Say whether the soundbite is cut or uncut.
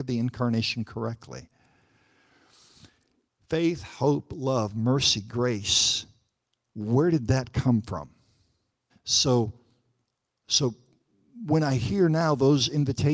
cut